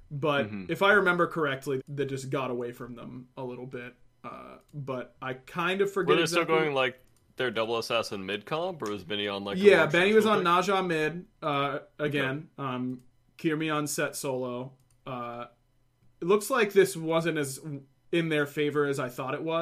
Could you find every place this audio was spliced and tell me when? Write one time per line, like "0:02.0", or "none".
0:01.8